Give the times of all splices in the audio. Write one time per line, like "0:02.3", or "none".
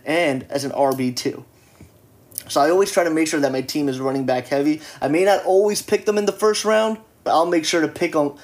0:07.3